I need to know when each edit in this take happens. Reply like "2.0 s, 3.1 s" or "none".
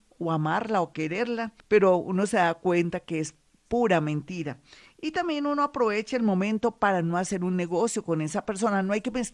1.6 s